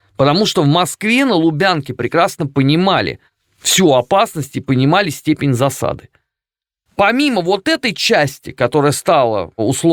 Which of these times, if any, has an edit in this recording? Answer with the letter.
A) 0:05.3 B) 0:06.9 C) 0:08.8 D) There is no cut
B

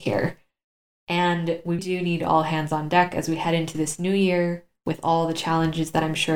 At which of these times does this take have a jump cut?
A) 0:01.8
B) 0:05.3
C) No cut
A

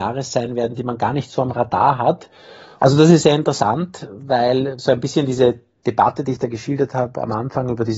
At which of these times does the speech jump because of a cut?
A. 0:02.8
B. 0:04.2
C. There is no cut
A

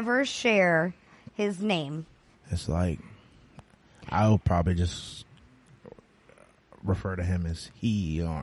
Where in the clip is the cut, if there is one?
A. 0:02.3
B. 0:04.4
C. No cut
A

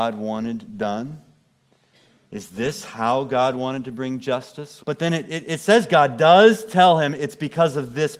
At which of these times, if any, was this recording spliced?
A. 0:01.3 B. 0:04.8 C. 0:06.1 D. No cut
B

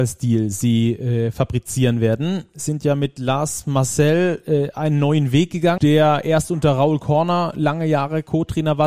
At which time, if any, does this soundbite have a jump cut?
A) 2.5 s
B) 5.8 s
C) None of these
B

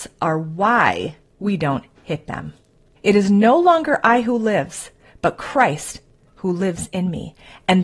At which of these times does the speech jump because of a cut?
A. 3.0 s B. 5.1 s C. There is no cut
A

